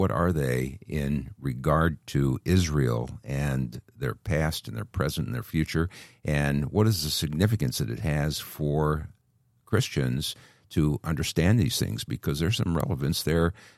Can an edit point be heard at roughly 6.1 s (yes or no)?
no